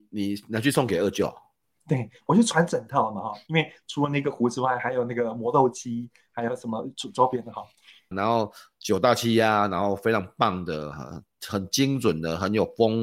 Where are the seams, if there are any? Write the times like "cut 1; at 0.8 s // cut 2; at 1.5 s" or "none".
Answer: cut 1; at 8.1 s